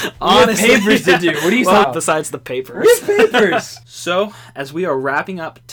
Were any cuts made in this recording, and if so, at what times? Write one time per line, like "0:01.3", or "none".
0:01.8
0:03.8